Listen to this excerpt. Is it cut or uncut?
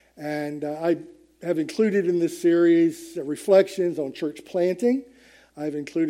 uncut